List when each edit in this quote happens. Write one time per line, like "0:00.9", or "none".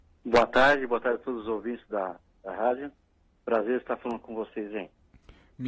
none